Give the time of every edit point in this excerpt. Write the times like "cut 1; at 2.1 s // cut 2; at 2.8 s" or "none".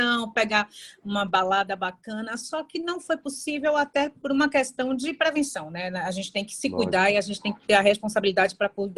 none